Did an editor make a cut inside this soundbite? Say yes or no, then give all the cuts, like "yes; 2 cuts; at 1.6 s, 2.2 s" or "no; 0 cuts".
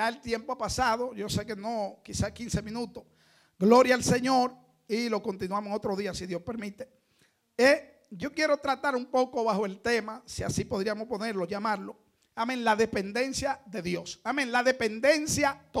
no; 0 cuts